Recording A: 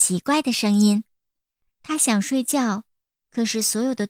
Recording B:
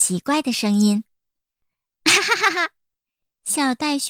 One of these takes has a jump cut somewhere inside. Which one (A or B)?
A